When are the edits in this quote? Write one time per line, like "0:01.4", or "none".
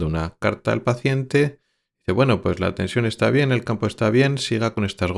none

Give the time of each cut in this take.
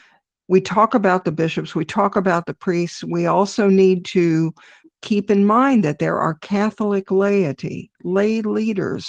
none

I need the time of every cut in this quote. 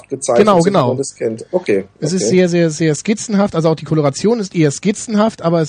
none

